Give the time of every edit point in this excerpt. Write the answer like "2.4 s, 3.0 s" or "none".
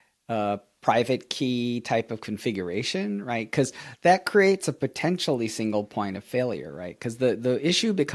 none